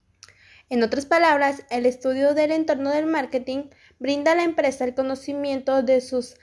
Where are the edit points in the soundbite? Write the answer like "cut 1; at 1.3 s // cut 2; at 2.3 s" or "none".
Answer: none